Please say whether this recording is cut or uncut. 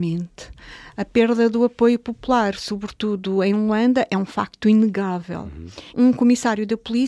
cut